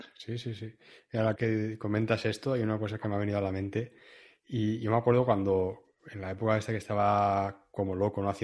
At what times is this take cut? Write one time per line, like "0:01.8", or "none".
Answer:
0:01.4

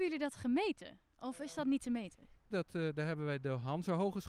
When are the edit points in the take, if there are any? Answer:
0:02.5

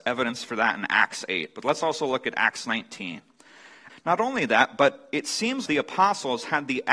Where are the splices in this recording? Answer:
0:03.9
0:05.7

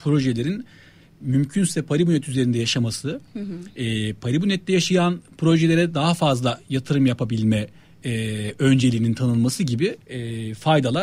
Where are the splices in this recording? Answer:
0:10.0

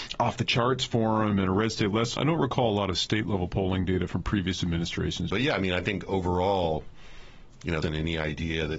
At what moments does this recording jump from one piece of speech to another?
0:02.2
0:05.3
0:07.8

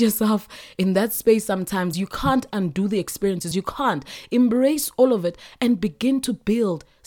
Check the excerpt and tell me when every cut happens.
0:01.9
0:03.5

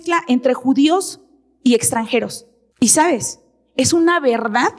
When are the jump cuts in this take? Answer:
0:02.7

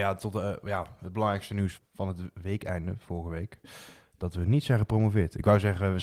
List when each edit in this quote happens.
0:01.8

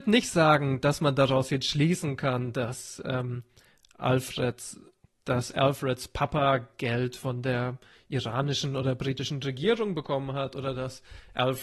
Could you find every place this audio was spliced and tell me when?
none

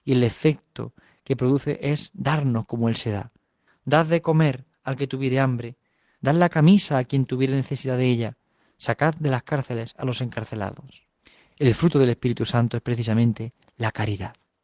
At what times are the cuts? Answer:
0:03.7
0:06.2

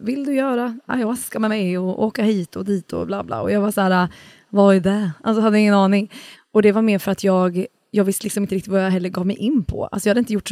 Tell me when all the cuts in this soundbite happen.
0:06.3

